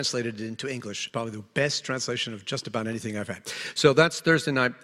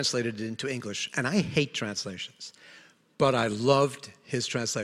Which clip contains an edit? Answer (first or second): first